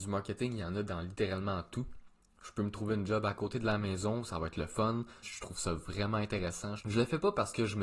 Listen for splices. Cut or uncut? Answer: cut